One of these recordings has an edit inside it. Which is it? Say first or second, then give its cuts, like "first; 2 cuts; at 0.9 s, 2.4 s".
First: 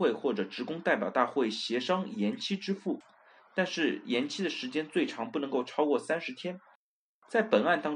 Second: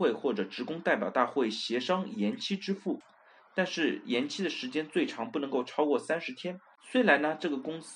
second; 1 cut; at 6.8 s